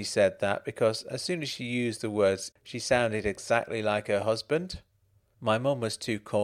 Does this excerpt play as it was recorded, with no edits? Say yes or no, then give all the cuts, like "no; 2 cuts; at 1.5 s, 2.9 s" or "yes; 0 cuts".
no; 1 cut; at 2.5 s